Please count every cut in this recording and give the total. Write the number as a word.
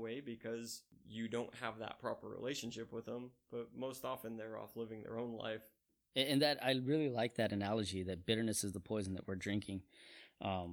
zero